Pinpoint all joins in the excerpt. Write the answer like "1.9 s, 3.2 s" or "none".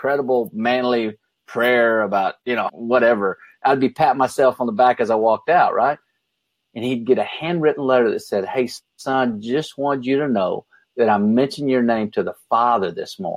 2.7 s, 6.6 s